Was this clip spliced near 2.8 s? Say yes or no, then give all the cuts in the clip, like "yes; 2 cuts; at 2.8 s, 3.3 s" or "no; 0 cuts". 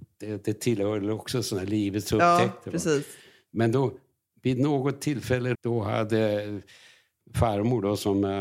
no; 1 cut; at 5.5 s